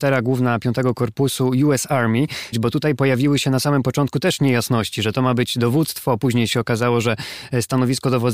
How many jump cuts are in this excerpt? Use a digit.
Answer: 1